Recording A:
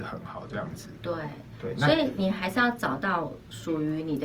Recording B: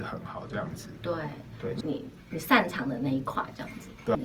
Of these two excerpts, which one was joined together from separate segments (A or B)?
B